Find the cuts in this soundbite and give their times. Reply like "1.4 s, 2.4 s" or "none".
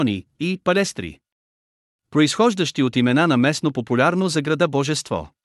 1.9 s